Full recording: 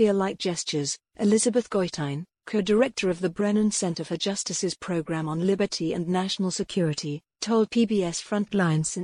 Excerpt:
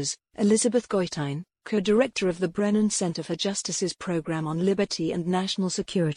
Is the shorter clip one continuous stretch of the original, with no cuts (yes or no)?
yes